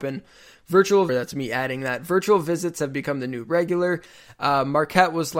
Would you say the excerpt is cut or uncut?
cut